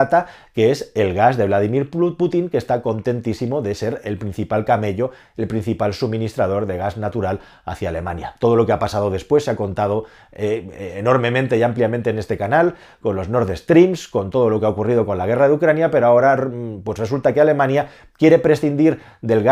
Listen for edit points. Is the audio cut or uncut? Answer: uncut